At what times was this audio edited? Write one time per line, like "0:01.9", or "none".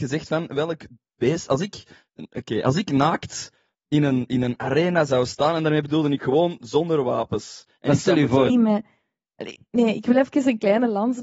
0:08.5